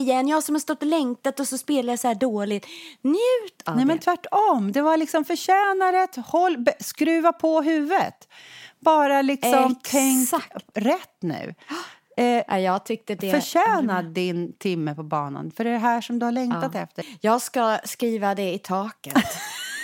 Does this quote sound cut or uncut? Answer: uncut